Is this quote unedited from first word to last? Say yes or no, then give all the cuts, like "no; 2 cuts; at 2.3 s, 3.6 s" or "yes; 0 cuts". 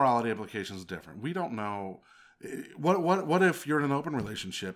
yes; 0 cuts